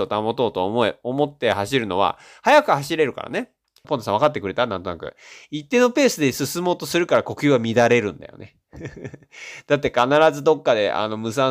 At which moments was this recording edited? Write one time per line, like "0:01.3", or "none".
0:03.8